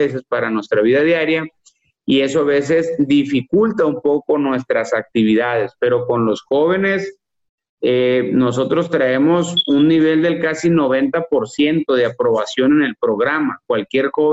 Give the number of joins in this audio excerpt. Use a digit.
0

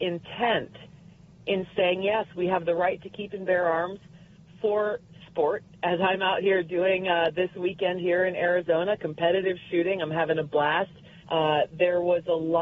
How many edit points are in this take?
1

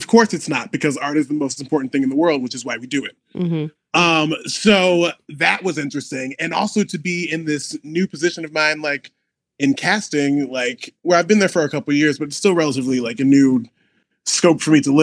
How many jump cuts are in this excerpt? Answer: 0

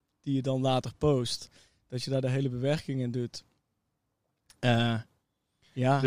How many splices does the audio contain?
0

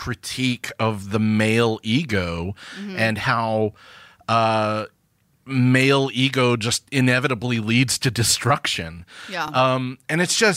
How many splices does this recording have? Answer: 0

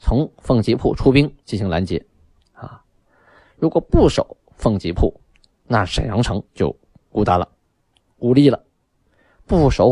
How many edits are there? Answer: 2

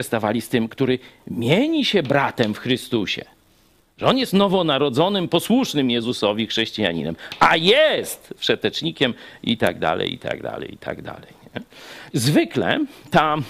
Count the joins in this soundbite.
1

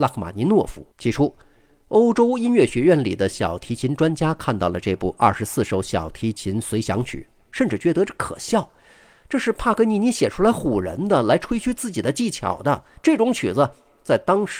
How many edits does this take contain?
1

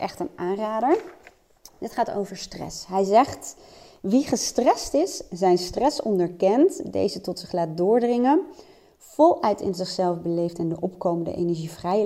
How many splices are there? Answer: 0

